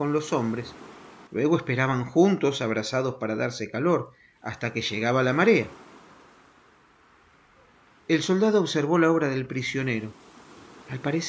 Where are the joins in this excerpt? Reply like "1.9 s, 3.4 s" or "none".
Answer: 1.3 s